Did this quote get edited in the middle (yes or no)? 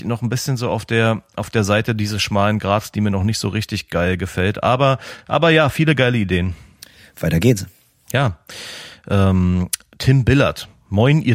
no